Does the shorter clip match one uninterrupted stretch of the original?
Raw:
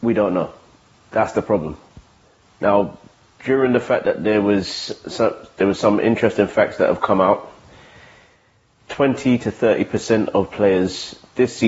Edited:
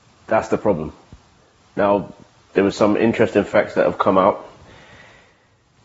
no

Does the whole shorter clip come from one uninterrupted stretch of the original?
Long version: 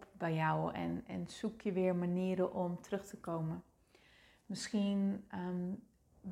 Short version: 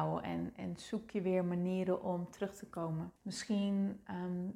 no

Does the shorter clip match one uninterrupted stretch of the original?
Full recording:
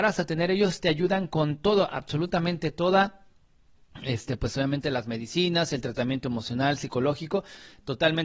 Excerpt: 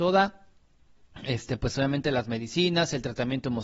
yes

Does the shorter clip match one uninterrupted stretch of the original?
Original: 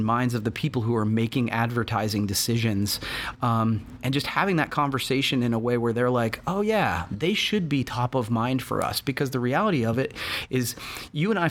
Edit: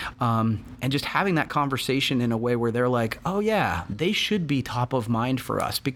yes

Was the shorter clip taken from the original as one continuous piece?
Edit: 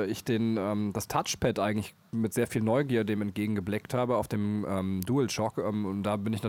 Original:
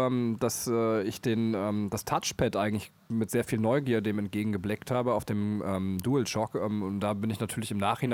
yes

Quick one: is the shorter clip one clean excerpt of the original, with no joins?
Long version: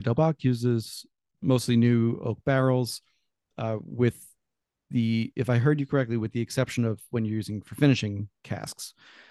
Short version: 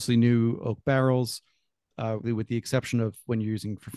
no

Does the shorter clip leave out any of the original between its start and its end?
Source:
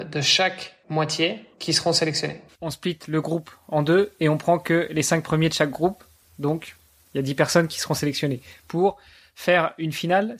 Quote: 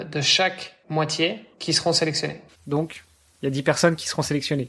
yes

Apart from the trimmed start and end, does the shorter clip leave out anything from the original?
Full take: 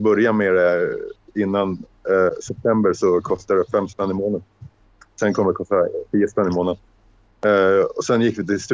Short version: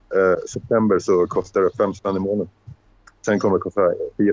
no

